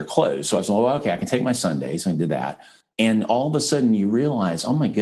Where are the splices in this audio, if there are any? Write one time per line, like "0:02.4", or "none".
0:02.9